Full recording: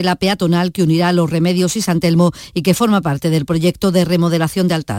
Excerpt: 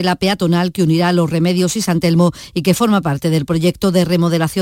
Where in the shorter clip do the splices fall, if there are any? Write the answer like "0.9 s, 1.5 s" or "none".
none